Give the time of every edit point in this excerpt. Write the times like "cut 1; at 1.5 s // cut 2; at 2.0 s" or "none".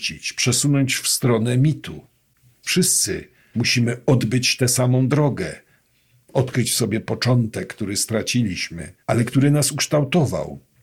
cut 1; at 2.6 s // cut 2; at 9.0 s